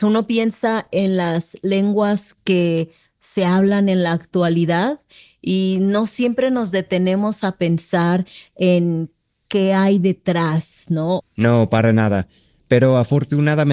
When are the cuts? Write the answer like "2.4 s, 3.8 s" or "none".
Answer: 11.2 s